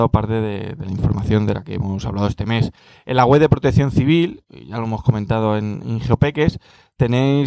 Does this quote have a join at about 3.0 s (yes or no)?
no